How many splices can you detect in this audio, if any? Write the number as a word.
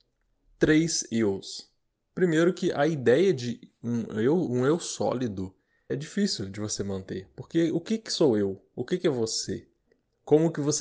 one